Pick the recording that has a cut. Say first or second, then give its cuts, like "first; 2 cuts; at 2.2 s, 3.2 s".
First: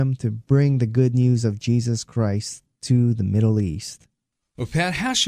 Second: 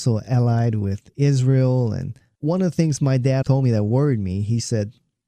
second; 1 cut; at 3.4 s